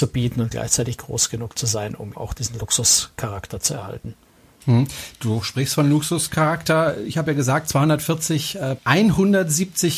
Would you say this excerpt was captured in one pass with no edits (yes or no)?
no